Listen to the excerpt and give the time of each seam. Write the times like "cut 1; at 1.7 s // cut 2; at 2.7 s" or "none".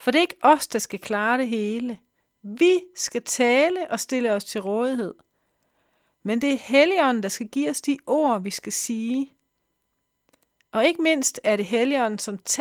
none

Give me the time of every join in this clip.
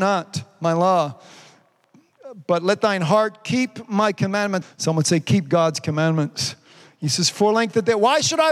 cut 1; at 4.6 s

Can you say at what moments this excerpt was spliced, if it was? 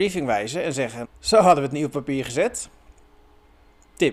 cut 1; at 1.0 s

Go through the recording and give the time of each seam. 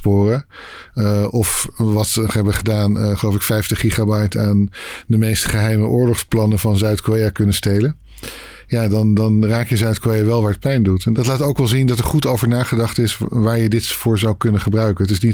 none

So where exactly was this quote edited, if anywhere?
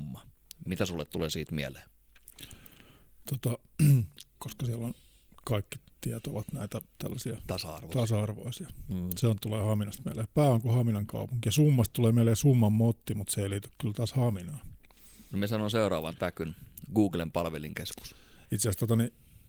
cut 1; at 4.3 s // cut 2; at 18.4 s

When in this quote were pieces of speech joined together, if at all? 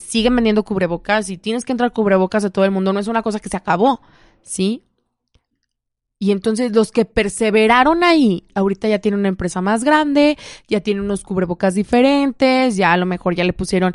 cut 1; at 8.5 s

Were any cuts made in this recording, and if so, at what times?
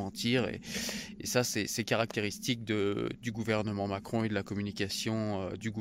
none

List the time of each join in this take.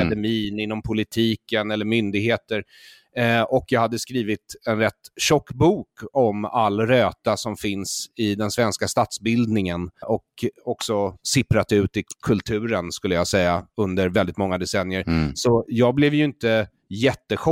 cut 1; at 10.0 s

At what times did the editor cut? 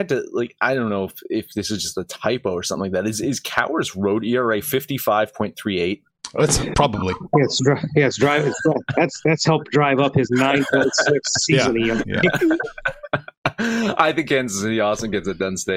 none

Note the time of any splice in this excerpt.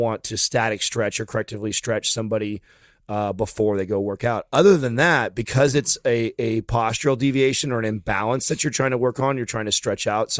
none

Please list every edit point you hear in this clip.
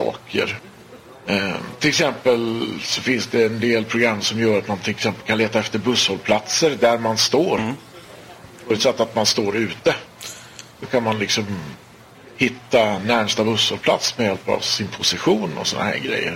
none

